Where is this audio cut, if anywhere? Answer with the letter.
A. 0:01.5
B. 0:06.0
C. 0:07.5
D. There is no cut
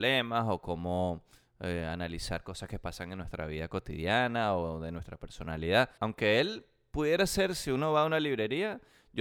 B